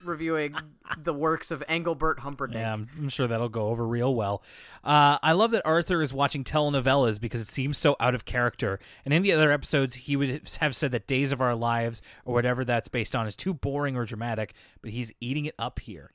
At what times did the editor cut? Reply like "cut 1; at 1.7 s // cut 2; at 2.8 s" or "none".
none